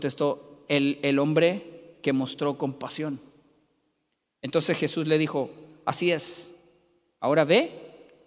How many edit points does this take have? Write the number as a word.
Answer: zero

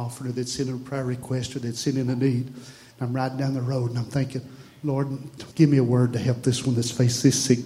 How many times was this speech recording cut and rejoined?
two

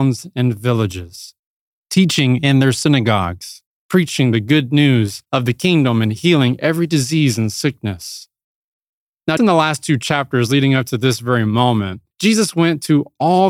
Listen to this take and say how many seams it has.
two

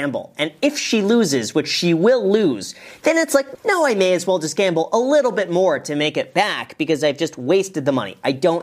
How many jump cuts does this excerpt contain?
one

